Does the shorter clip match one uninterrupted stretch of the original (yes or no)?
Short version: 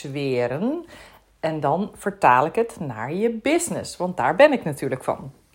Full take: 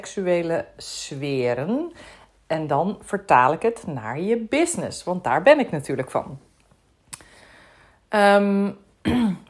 yes